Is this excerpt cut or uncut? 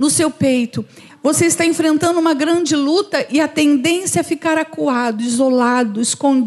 cut